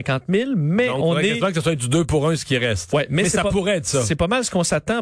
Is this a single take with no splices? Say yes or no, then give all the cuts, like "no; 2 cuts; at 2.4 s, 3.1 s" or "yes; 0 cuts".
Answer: yes; 0 cuts